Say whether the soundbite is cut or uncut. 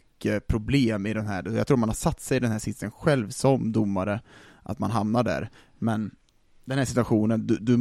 uncut